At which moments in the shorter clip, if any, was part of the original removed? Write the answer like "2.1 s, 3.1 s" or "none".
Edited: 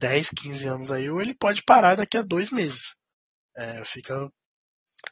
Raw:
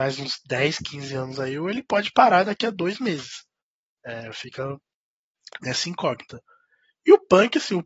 none